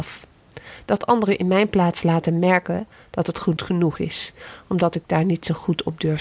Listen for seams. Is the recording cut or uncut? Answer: cut